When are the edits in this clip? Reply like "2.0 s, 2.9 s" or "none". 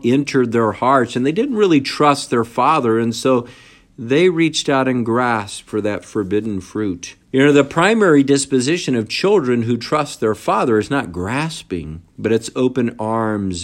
7.2 s, 12.1 s